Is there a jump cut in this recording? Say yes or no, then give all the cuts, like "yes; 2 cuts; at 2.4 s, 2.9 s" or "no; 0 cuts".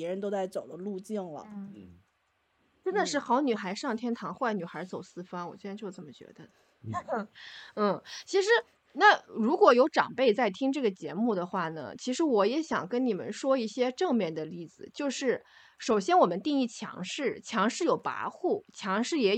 no; 0 cuts